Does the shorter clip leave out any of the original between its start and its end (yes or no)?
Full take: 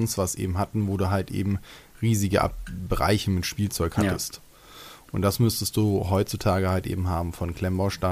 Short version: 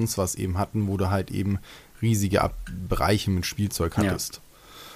no